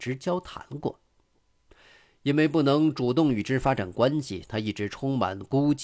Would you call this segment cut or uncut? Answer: uncut